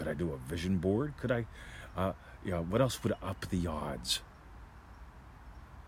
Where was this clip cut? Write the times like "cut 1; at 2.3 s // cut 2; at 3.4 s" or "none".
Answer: none